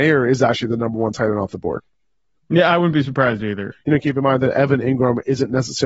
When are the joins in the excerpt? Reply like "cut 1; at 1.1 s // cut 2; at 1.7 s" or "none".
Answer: cut 1; at 3.7 s

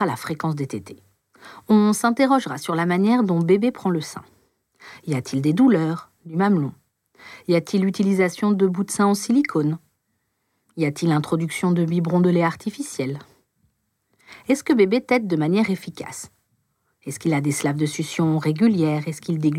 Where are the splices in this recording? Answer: cut 1; at 1.6 s // cut 2; at 6.2 s

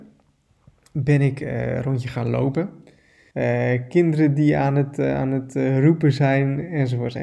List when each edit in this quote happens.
cut 1; at 3.3 s

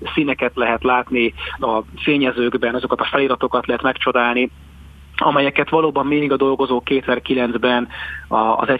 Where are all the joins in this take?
cut 1; at 1.6 s

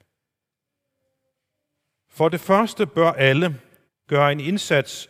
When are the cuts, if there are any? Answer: cut 1; at 3.9 s

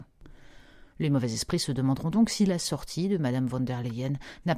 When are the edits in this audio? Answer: cut 1; at 0.9 s

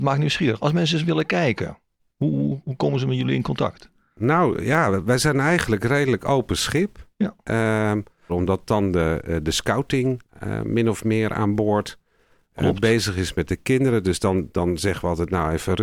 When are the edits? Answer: cut 1; at 8.3 s

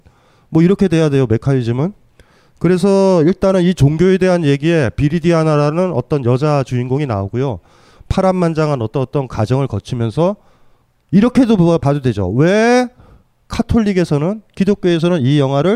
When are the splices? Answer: none

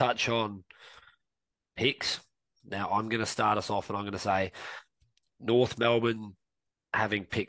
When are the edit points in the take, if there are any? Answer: cut 1; at 2.6 s

